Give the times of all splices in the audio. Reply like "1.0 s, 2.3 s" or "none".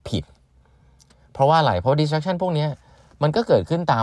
none